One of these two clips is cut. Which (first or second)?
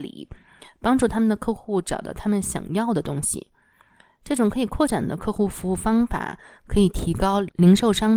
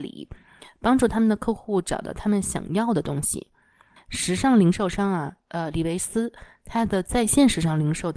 second